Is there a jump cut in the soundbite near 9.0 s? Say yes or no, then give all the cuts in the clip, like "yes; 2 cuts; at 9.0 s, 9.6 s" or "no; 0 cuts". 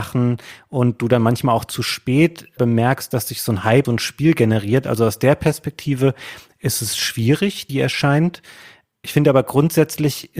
no; 2 cuts; at 3.8 s, 7.7 s